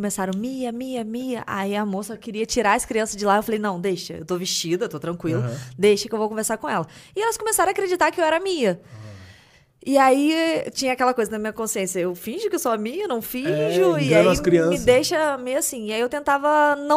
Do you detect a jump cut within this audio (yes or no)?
no